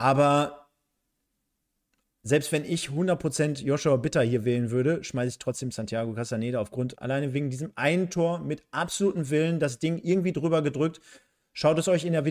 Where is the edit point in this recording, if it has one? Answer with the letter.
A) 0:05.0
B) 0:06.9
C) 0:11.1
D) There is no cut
B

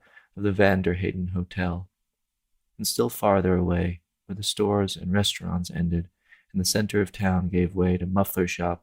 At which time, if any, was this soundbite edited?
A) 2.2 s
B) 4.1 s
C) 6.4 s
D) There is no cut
D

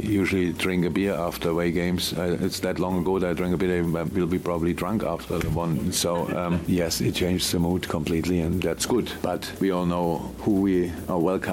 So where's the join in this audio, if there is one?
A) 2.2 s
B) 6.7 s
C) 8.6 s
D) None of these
C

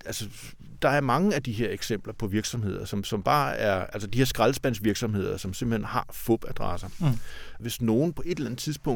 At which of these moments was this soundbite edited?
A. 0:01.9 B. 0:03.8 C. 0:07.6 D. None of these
C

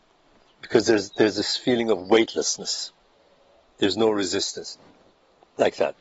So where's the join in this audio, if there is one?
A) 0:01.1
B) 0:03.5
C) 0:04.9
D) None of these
D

